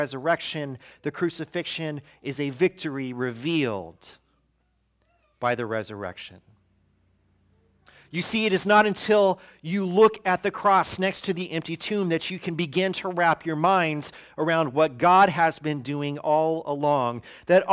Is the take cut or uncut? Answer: uncut